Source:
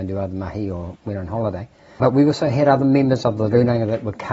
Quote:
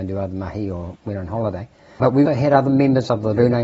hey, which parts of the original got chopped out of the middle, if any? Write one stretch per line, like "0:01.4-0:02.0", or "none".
0:02.3-0:02.4